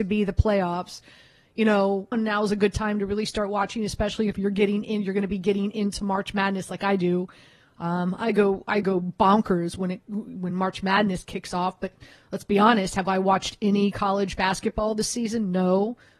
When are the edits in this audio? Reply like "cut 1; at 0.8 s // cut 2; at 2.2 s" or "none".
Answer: cut 1; at 2.1 s